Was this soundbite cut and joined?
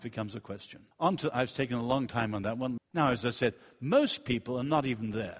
yes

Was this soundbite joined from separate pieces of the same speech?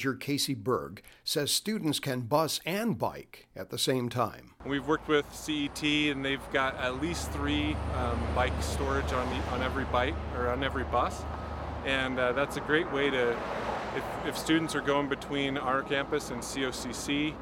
no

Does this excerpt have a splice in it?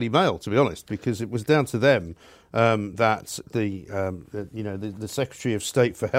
no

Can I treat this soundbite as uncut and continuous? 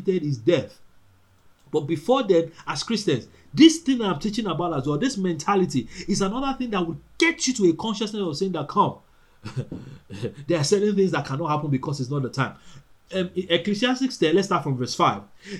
yes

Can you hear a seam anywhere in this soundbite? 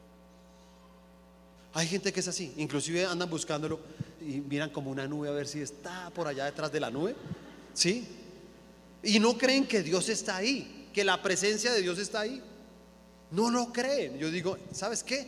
yes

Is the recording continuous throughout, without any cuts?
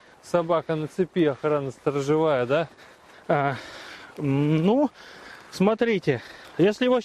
no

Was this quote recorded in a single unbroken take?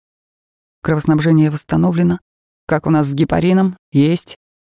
no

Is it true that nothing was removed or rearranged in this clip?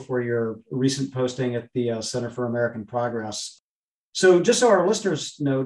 yes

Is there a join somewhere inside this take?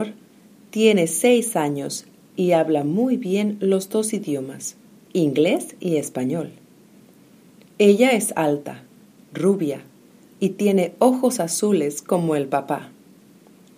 no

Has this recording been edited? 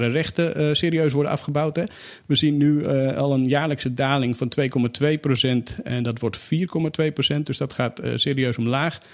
no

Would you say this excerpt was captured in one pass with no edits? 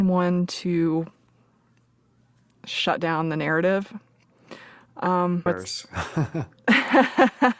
no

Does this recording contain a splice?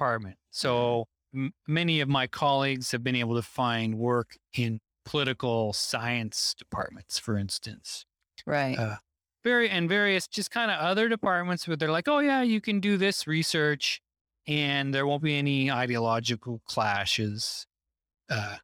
no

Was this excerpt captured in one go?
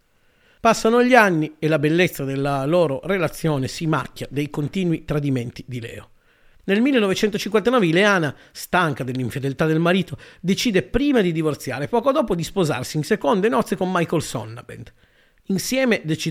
yes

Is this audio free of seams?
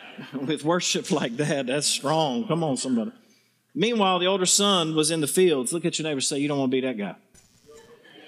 yes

